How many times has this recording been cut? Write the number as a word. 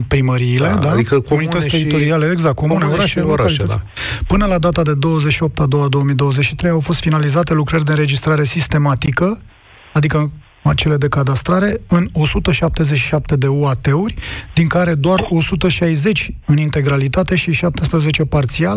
zero